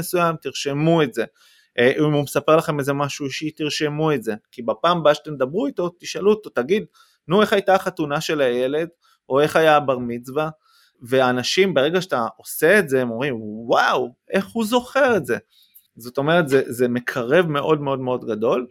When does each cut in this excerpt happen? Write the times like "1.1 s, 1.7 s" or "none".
none